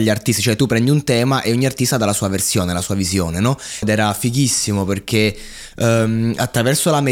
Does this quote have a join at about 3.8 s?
yes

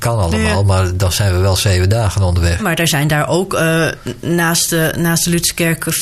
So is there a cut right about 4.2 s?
no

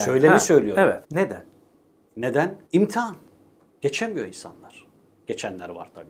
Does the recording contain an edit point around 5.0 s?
no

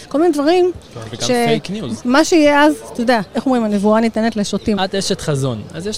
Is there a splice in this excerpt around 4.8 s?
yes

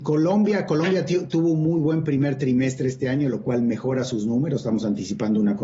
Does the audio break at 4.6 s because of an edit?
no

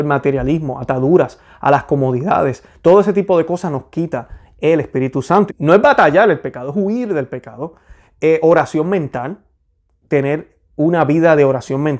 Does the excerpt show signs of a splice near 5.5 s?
yes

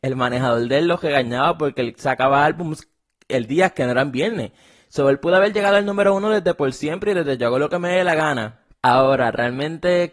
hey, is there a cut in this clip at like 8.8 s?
yes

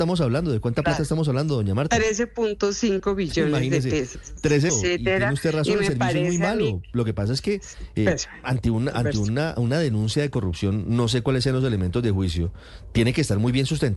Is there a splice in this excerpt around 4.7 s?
yes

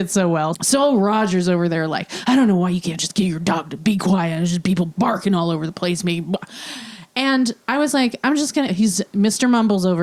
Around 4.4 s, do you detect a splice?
no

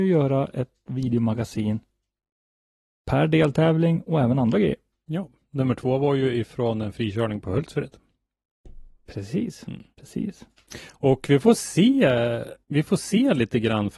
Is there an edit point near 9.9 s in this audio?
yes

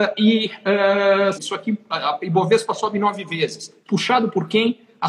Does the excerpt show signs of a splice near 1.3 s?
yes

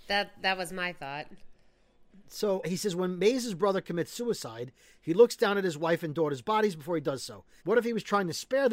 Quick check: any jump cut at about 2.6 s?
yes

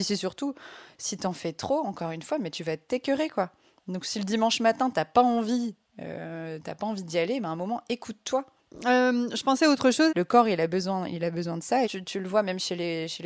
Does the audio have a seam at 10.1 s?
yes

